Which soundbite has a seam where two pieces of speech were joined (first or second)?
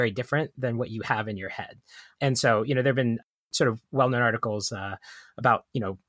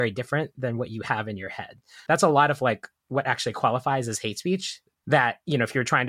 second